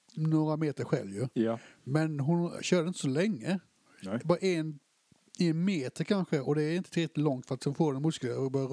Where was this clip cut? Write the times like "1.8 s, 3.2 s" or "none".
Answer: none